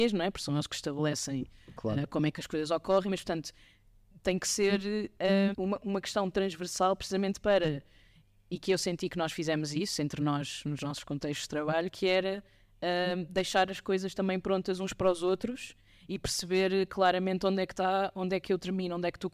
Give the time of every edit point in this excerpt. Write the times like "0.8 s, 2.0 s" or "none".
5.5 s

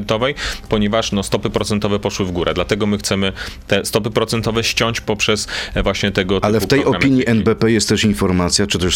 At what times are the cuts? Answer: none

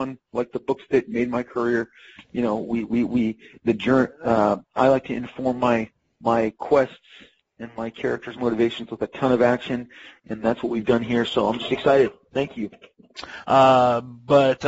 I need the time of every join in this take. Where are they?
13.4 s

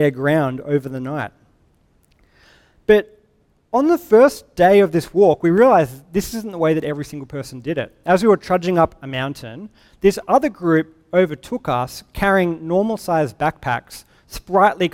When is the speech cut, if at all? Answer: none

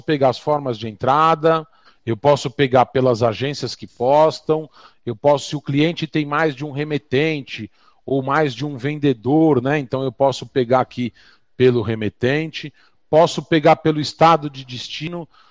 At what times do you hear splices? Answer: 1.9 s

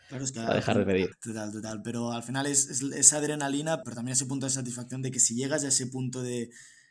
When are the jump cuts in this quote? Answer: 1.1 s, 3.8 s

